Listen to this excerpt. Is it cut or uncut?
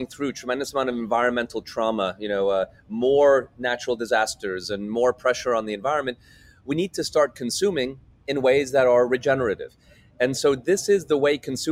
uncut